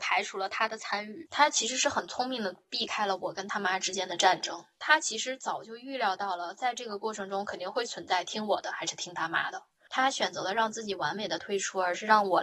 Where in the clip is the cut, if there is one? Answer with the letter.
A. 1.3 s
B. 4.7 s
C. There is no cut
C